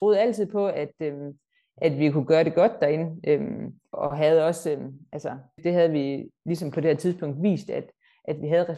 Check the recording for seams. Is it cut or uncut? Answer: cut